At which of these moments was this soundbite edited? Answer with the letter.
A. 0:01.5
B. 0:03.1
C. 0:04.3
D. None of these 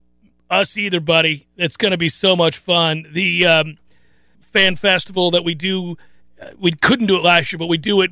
C